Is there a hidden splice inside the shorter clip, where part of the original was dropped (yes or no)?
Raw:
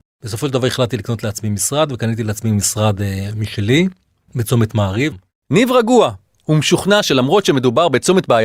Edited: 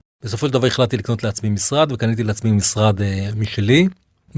no